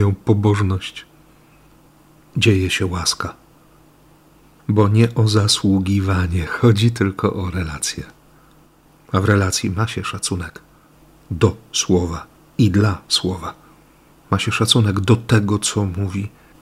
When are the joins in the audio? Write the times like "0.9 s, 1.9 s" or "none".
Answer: none